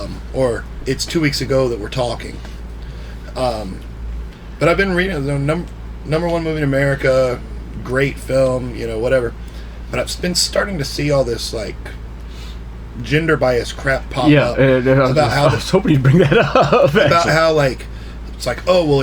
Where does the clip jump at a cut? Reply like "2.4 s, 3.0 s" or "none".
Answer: none